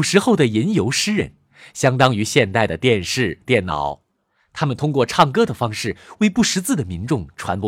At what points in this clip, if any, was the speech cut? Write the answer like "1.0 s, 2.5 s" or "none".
none